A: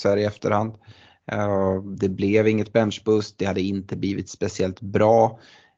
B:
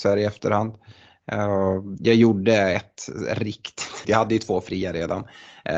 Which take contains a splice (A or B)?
B